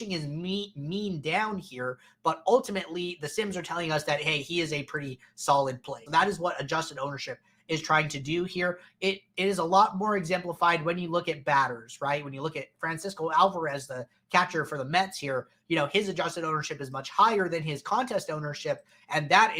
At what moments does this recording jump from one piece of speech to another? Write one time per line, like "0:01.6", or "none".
0:06.1